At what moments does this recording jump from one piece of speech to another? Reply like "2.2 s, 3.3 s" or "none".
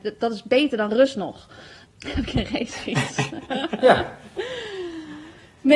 1.8 s